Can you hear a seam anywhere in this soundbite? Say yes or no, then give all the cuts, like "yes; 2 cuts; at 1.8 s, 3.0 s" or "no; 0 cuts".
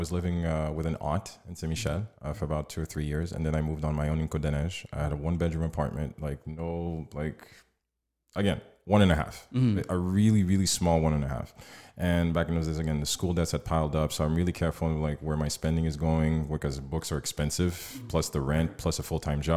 no; 0 cuts